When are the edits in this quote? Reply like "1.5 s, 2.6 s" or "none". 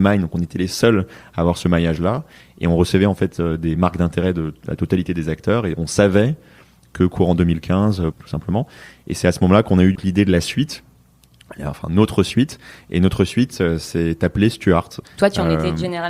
8.1 s, 10.0 s, 15.0 s